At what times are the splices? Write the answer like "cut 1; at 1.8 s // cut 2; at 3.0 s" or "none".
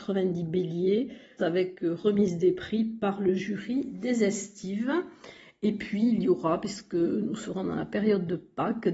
cut 1; at 1.4 s